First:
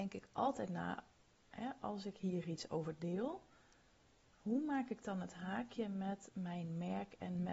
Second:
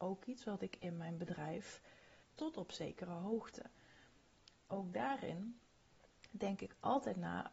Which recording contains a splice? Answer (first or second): second